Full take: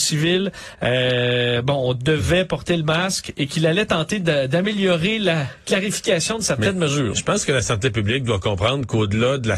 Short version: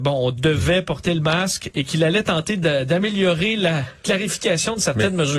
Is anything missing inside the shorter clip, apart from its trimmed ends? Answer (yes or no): no